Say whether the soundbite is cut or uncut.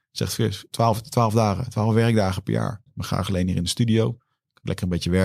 cut